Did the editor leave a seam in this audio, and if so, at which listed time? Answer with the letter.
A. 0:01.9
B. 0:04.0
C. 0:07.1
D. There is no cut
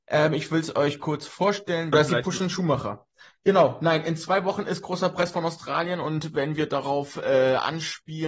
A